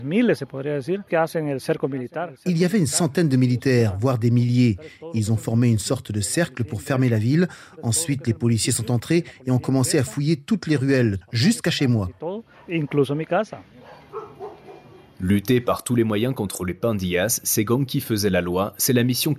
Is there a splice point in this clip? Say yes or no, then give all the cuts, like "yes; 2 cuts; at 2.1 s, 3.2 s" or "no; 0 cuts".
yes; 1 cut; at 11.2 s